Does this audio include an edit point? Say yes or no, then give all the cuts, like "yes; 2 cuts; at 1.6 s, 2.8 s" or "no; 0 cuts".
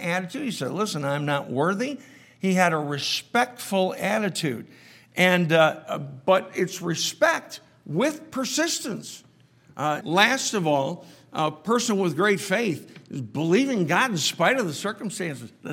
yes; 1 cut; at 10.0 s